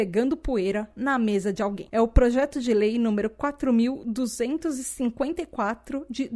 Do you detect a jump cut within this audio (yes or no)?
no